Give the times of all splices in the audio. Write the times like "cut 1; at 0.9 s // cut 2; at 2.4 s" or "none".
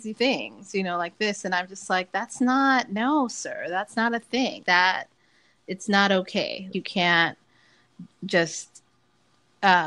cut 1; at 4.6 s // cut 2; at 6.7 s